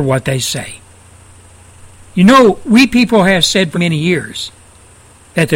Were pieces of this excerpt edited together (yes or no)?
yes